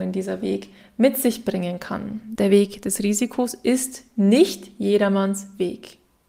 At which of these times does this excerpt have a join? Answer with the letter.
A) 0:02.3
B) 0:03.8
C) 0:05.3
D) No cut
A